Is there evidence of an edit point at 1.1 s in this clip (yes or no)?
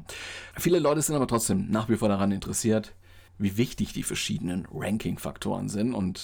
no